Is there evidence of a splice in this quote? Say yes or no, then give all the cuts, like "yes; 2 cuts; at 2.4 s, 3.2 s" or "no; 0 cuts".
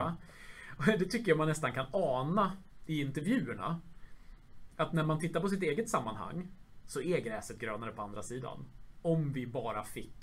no; 0 cuts